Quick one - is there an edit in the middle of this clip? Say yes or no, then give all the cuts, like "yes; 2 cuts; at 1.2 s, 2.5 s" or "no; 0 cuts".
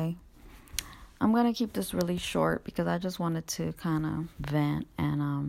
no; 0 cuts